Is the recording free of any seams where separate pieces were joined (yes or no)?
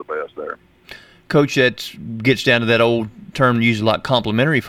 yes